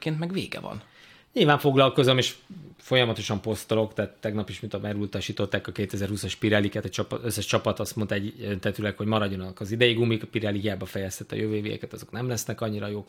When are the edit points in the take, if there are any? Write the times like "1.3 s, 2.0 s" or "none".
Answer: none